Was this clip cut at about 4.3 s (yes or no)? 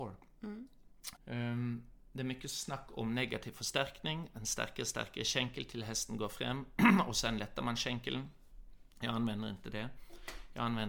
no